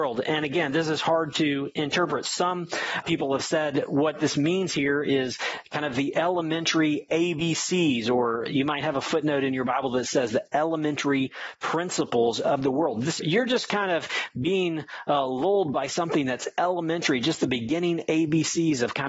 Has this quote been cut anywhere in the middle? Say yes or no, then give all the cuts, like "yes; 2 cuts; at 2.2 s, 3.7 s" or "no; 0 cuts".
yes; 2 cuts; at 3.0 s, 13.2 s